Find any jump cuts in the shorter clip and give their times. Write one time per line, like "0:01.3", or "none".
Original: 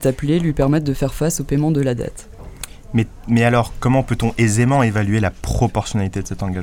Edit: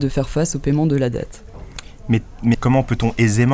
0:02.5